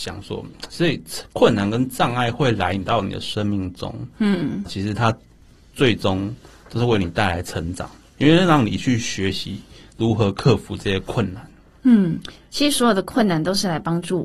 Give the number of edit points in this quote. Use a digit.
1